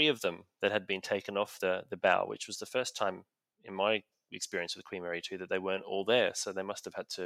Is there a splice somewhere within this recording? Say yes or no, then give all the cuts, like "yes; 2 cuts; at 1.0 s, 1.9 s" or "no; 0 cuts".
no; 0 cuts